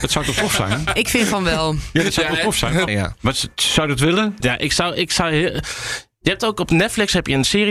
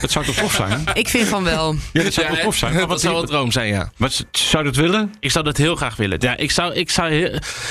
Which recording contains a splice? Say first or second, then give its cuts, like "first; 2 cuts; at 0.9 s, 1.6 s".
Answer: first; 2 cuts; at 2.9 s, 4.4 s